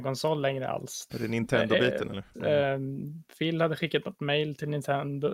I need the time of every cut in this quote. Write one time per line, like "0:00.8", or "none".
0:01.1
0:02.3